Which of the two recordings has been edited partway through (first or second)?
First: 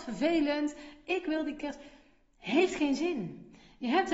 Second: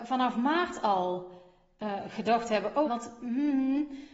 second